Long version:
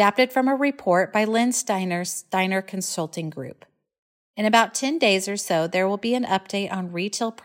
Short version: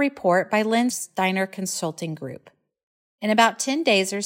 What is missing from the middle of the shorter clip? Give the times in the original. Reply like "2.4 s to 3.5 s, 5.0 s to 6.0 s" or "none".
1.5 s to 2.1 s